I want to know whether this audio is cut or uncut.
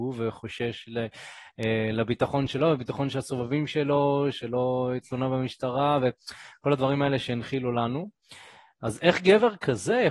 uncut